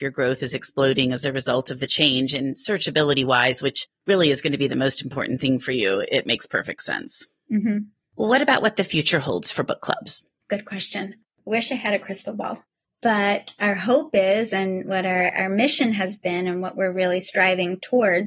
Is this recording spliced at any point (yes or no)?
no